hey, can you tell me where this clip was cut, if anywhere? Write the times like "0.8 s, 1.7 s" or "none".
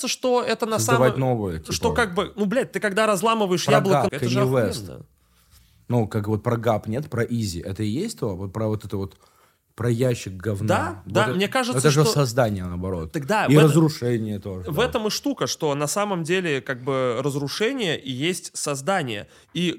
4.1 s